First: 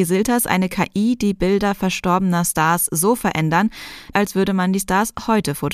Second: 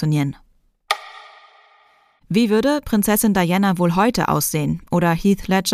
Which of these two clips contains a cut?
first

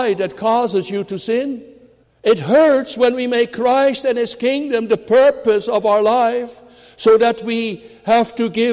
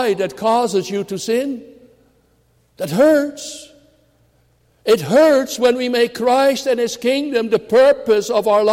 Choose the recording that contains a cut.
first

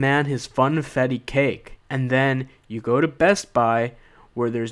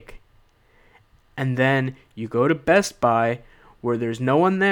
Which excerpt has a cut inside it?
first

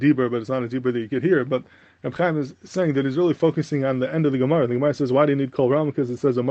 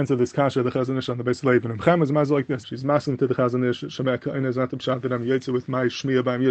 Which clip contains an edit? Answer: second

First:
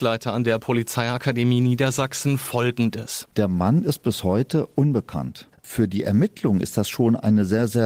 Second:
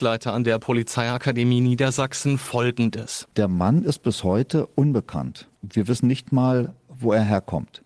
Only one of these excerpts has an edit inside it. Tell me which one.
first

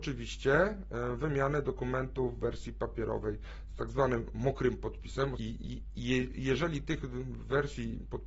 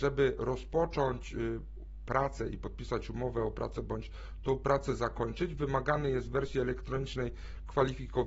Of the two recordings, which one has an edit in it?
first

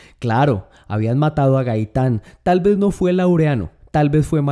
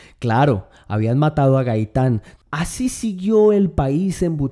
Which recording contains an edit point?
second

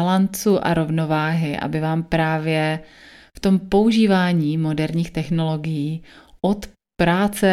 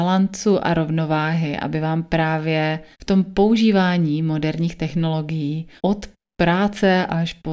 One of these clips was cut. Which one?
second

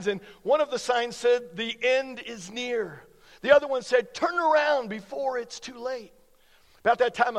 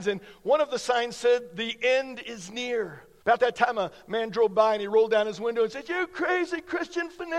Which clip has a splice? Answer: second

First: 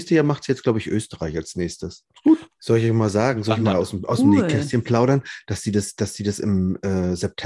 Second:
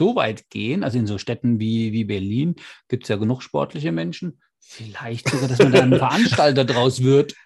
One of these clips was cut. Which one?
first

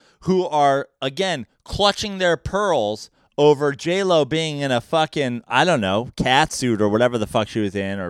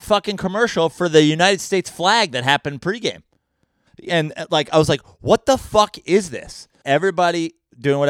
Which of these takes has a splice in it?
second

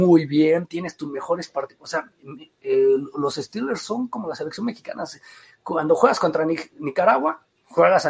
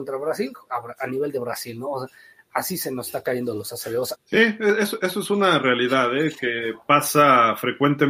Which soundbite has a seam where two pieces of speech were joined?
second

